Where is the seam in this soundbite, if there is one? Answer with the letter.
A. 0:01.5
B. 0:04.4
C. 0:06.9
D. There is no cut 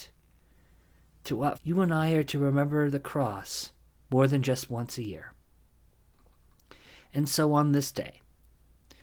A